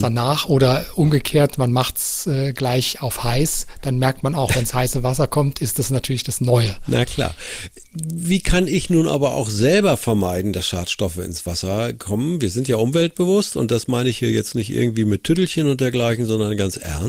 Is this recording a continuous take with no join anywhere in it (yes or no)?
yes